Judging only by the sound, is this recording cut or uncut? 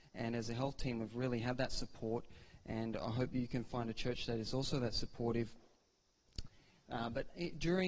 uncut